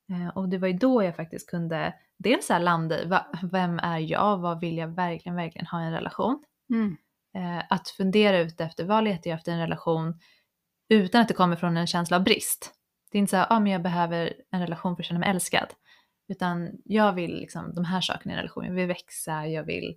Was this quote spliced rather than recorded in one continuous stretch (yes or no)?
no